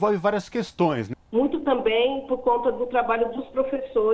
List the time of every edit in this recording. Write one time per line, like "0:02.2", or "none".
0:01.1